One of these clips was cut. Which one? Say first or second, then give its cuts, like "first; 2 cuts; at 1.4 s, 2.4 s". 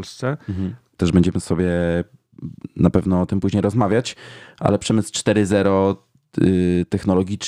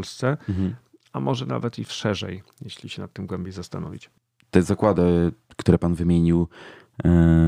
first; 1 cut; at 0.9 s